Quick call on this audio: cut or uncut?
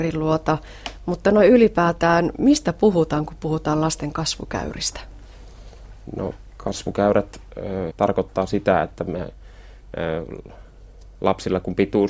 cut